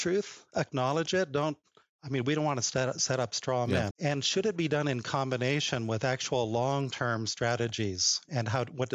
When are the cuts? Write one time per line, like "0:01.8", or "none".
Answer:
0:03.9